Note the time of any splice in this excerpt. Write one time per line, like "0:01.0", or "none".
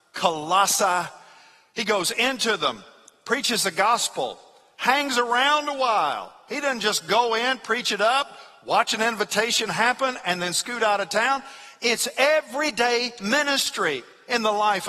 none